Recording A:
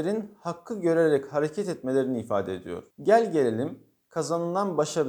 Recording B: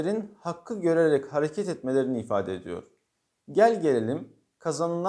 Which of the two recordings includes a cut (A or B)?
A